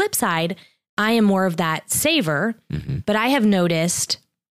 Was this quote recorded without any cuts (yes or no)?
yes